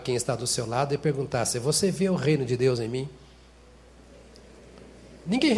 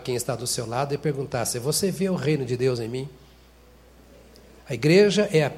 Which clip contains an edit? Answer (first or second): second